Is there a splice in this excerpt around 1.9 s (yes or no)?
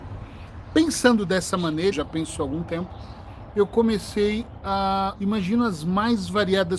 yes